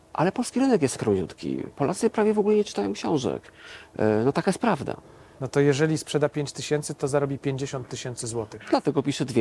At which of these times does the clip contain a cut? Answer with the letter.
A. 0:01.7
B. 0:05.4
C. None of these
B